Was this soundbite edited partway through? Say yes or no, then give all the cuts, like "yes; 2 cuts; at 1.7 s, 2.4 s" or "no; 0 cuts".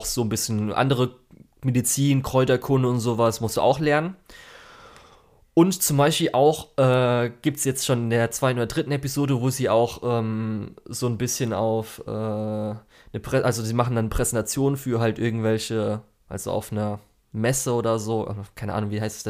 no; 0 cuts